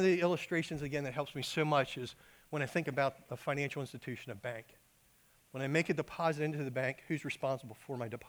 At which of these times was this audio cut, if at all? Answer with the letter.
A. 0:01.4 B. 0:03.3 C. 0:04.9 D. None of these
B